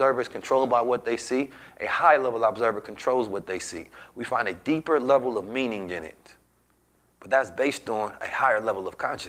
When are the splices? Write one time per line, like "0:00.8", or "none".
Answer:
none